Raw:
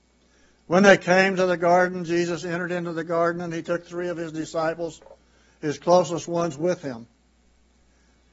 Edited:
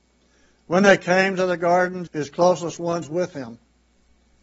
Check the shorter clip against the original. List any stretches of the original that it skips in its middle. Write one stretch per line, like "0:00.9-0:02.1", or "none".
0:02.1-0:05.5